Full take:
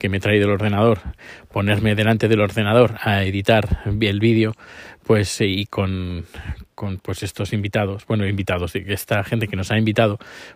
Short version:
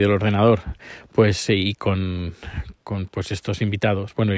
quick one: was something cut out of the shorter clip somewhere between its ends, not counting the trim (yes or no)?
yes